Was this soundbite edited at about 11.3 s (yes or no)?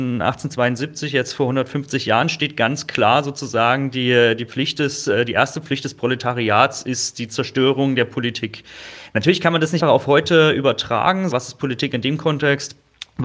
yes